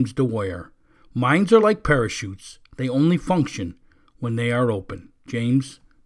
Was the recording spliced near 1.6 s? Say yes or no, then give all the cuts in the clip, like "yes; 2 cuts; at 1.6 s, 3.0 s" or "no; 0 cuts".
no; 0 cuts